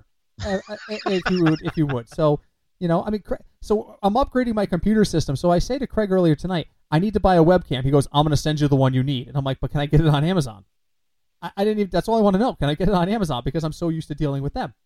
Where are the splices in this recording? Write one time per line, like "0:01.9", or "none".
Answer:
none

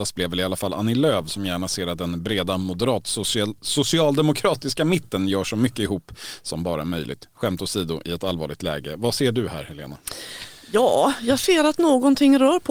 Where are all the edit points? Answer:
none

